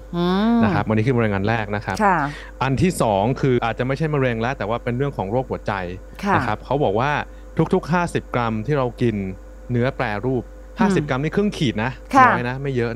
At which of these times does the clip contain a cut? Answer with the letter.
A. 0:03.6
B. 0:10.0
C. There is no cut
A